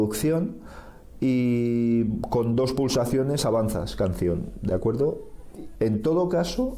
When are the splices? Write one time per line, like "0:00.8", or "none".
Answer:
0:05.7